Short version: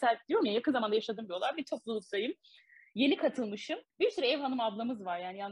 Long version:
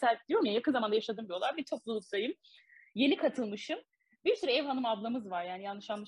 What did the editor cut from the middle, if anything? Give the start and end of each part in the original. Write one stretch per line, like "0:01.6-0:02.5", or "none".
0:03.9-0:04.2